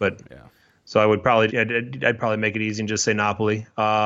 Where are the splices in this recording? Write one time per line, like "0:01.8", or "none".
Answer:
0:01.5